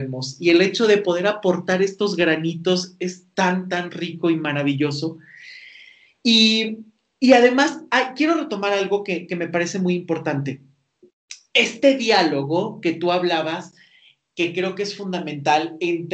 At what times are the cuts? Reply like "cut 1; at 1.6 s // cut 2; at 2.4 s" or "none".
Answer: none